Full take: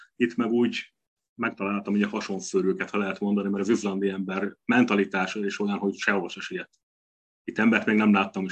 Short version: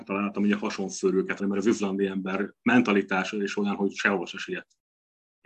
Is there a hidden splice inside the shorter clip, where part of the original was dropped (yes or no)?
yes